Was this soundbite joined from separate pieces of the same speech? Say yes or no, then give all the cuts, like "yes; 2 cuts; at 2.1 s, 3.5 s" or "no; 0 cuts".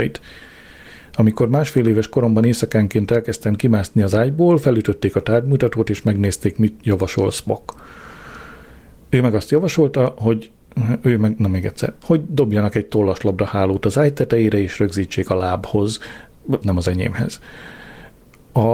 yes; 2 cuts; at 12.0 s, 16.6 s